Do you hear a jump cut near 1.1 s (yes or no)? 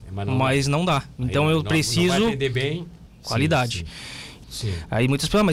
no